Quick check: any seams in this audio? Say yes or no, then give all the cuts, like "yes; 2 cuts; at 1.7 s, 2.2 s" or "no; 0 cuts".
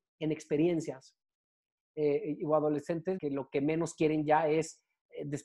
yes; 2 cuts; at 1.8 s, 3.2 s